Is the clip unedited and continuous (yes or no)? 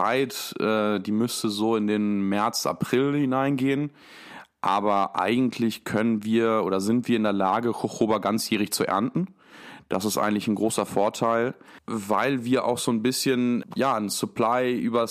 no